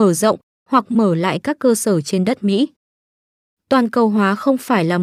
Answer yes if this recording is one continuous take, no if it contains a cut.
yes